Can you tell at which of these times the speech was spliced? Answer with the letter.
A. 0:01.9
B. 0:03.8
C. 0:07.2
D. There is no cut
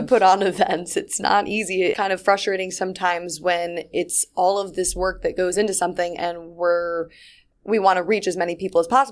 A